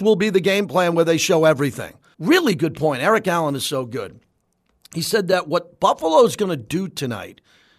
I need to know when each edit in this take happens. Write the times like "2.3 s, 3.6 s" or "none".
2.1 s